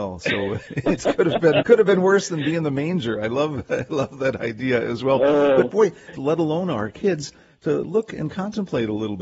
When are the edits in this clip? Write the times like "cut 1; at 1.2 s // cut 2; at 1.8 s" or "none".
cut 1; at 1.6 s // cut 2; at 6.1 s